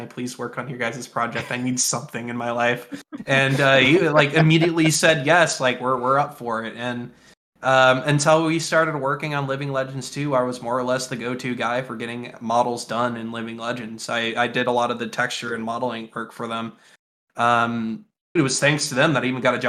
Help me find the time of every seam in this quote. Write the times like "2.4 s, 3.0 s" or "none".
18.4 s